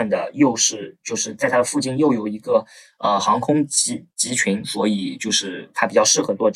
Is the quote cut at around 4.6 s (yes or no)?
no